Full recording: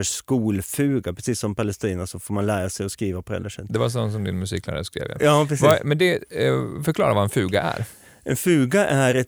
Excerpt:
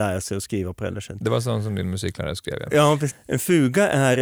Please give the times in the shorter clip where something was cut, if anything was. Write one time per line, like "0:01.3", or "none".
0:03.1